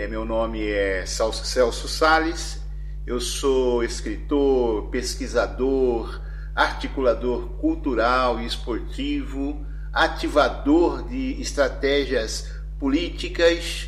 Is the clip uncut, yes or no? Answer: yes